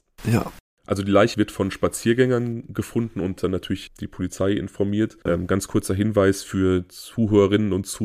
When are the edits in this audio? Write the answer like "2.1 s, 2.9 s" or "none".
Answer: 1.3 s, 3.9 s, 5.3 s